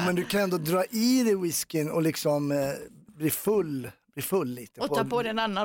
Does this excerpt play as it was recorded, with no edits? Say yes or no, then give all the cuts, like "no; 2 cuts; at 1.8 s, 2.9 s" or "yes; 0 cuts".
yes; 0 cuts